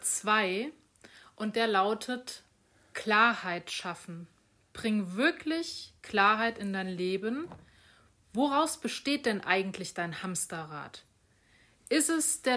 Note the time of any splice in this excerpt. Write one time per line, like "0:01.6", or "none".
none